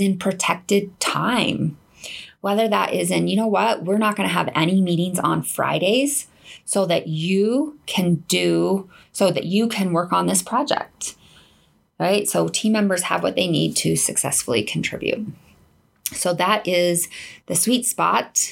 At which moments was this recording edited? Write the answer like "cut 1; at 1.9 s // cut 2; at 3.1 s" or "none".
none